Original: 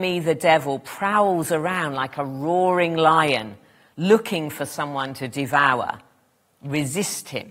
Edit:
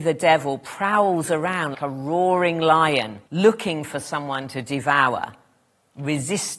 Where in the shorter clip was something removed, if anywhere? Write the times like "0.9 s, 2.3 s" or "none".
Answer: 1.7 s, 3.3 s